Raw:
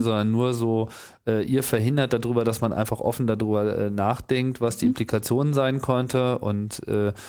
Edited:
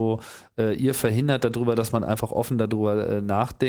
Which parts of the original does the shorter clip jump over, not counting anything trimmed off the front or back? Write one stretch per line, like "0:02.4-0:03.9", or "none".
none